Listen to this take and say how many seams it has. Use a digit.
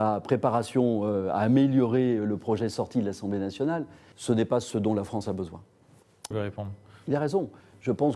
2